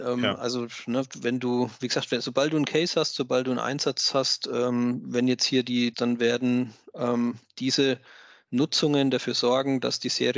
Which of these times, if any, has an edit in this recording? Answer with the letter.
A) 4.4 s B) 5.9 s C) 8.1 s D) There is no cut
B